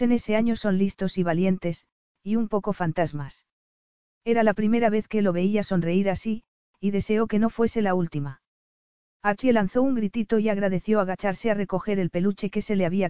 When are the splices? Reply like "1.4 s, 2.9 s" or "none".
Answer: 4.1 s

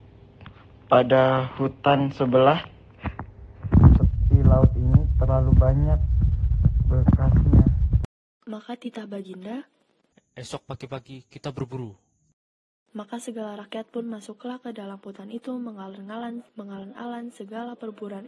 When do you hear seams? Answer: 10.1 s, 12.9 s, 16.5 s

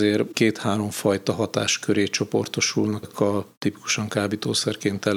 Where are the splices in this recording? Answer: 3.0 s

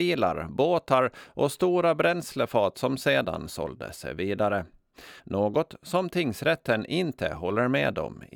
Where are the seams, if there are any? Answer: 5.2 s

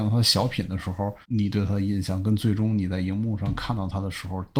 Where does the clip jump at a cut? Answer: 1.2 s

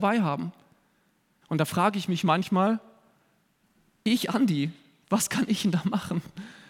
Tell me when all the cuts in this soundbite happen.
1.4 s

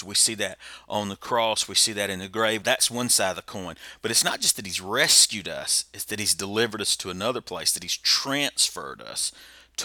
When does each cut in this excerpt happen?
2.6 s

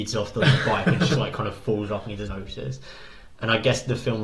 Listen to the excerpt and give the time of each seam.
1.1 s, 2.3 s

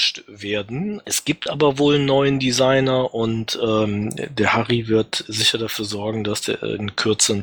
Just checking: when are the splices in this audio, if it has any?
1.0 s

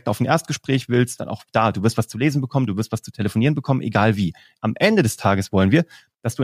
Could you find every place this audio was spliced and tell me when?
1.2 s, 4.6 s

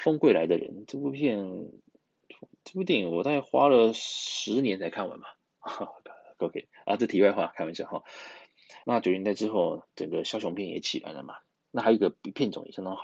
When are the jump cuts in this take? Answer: 8.8 s

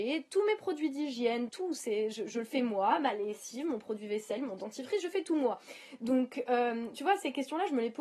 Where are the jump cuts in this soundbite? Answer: 1.5 s

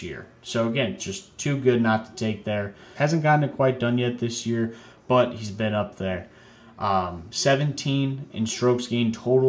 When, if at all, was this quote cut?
1.0 s, 3.0 s

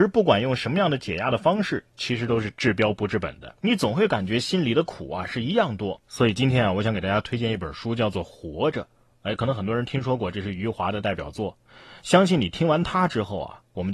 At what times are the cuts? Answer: none

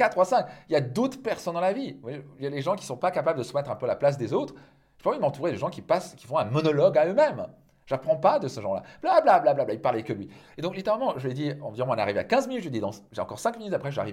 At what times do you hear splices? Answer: none

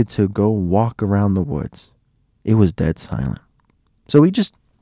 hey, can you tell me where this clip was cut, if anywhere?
3.9 s

